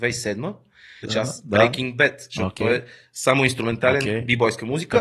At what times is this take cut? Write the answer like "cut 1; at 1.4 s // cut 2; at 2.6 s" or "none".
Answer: cut 1; at 1.0 s

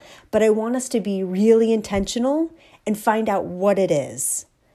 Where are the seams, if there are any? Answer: none

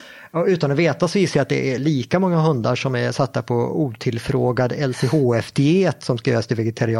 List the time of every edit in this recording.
none

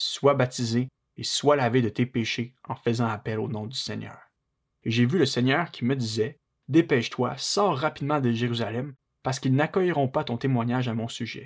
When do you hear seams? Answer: cut 1; at 4.7 s

